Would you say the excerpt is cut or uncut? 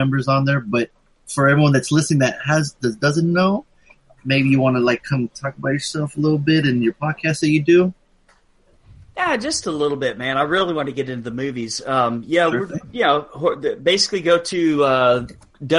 uncut